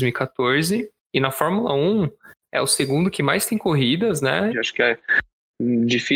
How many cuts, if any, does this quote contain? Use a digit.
1